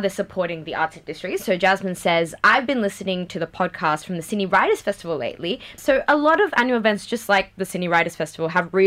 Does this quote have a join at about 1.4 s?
no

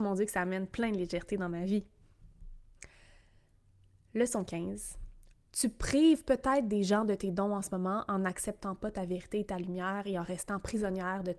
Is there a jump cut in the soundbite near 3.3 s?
no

